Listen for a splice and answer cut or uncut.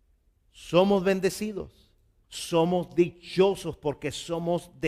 cut